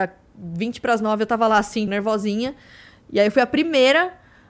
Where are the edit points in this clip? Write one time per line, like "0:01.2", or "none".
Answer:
0:01.9

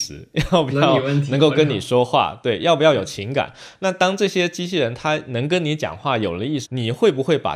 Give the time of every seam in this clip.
0:06.6

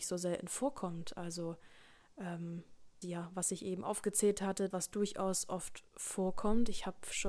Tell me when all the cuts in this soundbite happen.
0:03.0
0:04.7

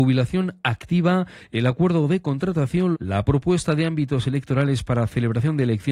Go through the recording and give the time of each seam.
0:02.9

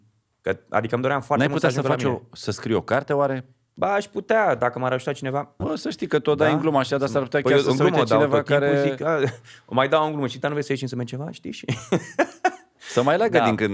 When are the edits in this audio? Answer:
0:05.6

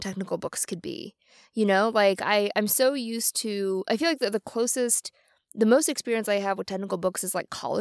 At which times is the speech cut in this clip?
none

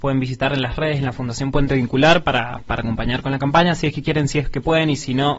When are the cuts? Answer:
none

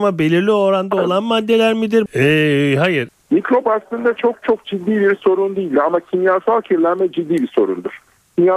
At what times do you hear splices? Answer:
0:02.1
0:03.1

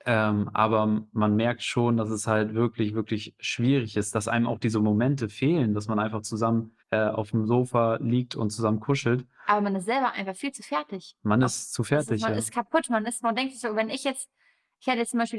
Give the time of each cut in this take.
0:06.8

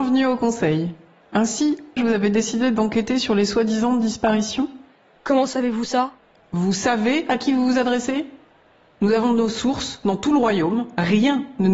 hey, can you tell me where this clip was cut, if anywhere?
0:02.0

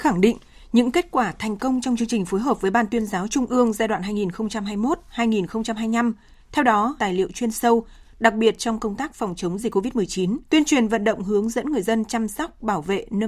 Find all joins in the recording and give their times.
0:07.0
0:10.5

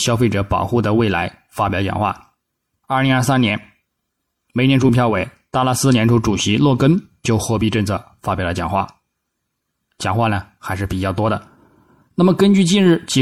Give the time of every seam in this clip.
0:02.7

